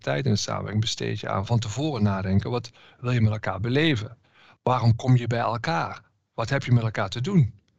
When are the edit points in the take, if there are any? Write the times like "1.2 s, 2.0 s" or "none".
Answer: none